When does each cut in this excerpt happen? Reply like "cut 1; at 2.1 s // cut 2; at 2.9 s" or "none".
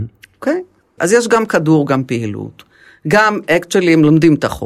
cut 1; at 1.0 s